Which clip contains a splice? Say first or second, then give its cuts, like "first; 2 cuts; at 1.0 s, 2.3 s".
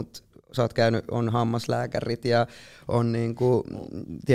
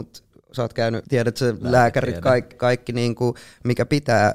second; 2 cuts; at 1.0 s, 2.5 s